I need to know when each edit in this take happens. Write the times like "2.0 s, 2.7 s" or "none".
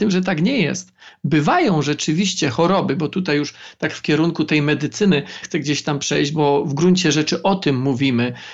5.4 s